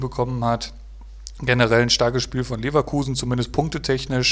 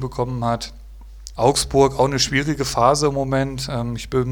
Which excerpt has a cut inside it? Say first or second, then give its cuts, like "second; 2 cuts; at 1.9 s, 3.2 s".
second; 1 cut; at 1.4 s